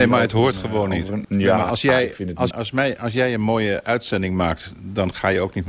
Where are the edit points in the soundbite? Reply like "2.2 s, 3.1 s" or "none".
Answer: 1.2 s, 2.5 s